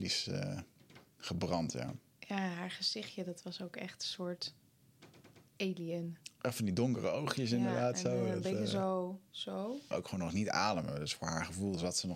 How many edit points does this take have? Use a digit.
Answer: 1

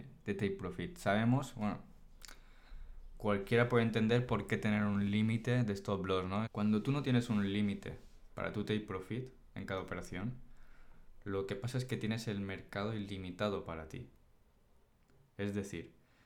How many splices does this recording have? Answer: 1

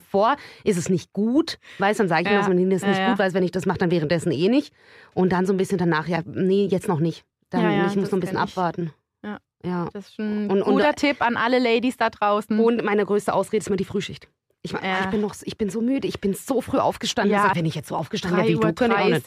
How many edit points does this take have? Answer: 1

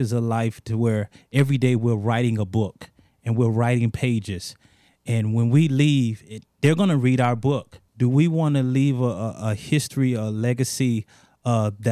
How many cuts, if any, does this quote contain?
1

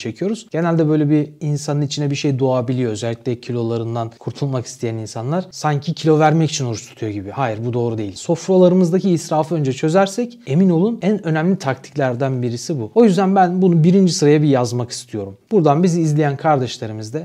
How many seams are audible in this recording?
2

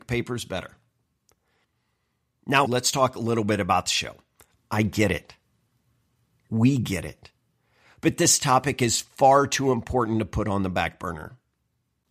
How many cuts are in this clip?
2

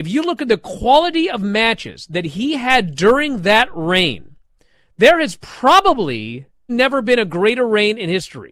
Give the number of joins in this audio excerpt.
1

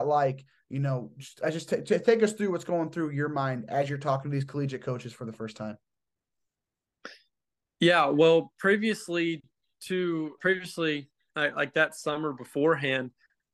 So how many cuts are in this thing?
1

